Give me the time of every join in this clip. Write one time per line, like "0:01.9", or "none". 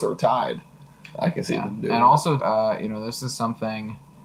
0:02.4